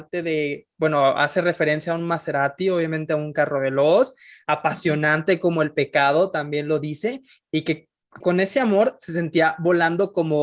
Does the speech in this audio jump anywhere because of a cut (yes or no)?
yes